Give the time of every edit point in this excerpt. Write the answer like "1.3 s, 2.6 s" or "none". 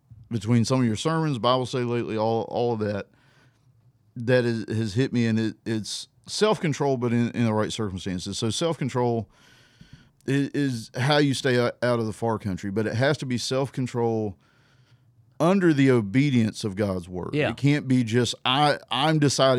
6.2 s, 10.1 s